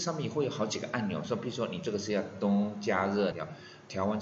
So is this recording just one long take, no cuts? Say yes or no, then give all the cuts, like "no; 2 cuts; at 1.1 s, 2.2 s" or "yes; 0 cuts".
no; 1 cut; at 3.3 s